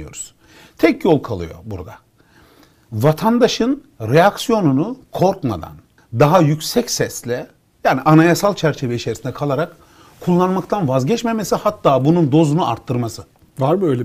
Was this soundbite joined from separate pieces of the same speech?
yes; 1 cut; at 6.0 s

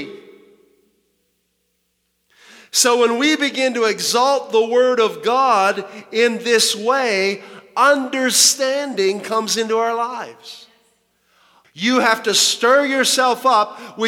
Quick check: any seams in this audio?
yes; 1 cut; at 11.6 s

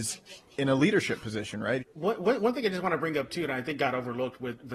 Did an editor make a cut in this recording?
yes; 1 cut; at 1.8 s

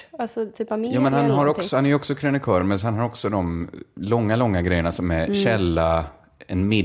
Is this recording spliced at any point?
no; 0 cuts

